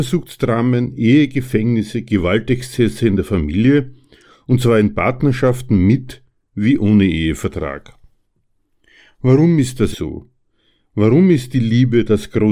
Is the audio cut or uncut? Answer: cut